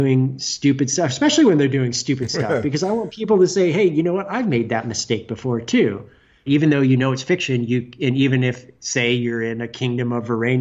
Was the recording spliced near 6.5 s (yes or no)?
yes